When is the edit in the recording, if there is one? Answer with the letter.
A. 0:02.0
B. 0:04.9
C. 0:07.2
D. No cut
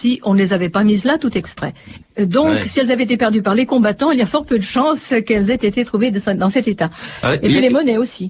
A